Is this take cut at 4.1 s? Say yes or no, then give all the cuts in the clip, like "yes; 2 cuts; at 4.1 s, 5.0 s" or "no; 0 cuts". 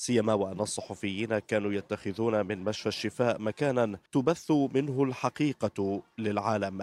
yes; 1 cut; at 4.1 s